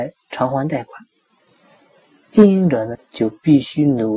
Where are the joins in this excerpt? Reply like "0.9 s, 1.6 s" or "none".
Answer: 2.9 s